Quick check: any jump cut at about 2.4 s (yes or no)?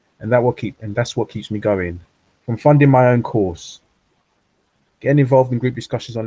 yes